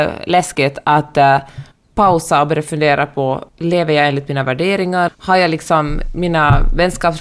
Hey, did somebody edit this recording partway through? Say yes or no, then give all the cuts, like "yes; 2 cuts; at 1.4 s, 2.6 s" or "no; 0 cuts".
yes; 1 cut; at 5.1 s